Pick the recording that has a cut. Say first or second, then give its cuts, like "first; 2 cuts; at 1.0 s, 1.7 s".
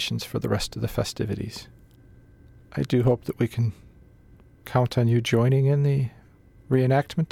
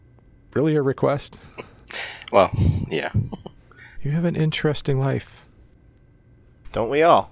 second; 1 cut; at 4.0 s